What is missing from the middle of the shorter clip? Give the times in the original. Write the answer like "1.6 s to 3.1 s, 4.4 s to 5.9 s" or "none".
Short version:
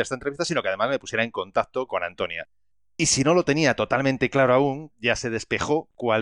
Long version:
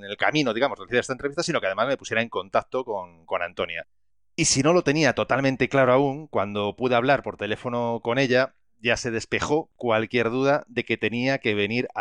2.8 s to 3.3 s, 6.3 s to 8.7 s